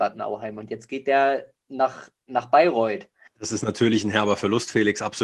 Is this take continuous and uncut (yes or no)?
no